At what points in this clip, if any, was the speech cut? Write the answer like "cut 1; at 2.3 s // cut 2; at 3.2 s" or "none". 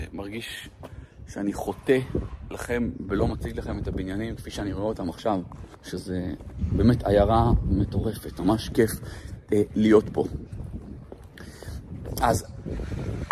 cut 1; at 5.7 s